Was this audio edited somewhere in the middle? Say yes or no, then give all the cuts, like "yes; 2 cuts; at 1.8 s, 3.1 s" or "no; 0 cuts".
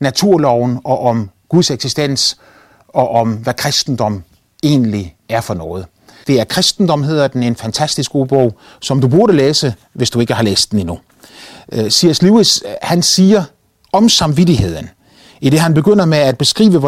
yes; 1 cut; at 6.2 s